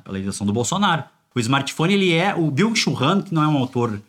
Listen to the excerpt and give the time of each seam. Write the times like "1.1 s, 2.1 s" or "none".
1.3 s

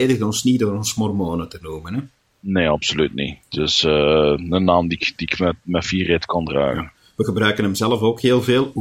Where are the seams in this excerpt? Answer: none

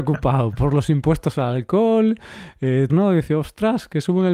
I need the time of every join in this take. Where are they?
2.9 s

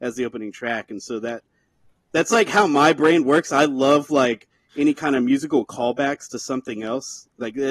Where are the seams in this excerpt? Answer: none

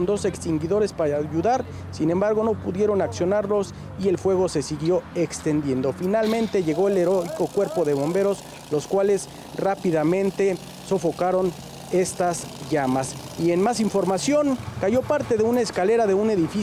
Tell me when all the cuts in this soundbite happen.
none

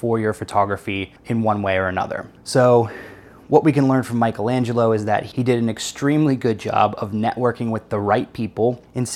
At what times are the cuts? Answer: 1.2 s

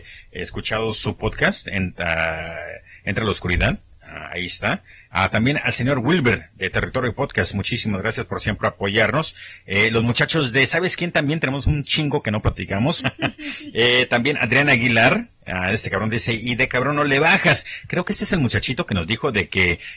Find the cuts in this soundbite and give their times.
13.0 s

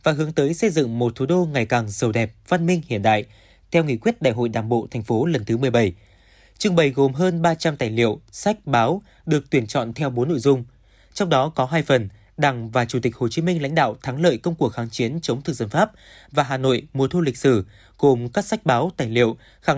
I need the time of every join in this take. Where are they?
none

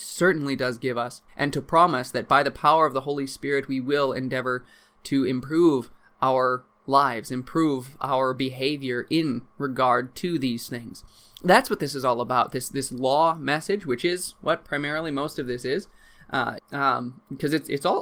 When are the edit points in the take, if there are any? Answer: 1.3 s, 16.6 s

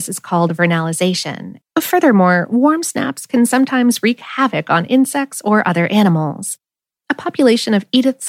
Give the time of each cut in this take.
1.6 s

